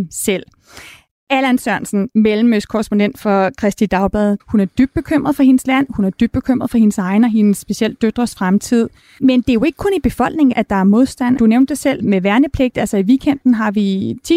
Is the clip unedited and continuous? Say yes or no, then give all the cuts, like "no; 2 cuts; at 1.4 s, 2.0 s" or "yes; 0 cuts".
no; 2 cuts; at 4.4 s, 10.5 s